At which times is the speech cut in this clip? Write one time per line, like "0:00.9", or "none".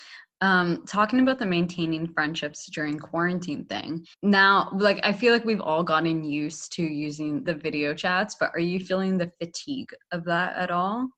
0:04.1
0:07.4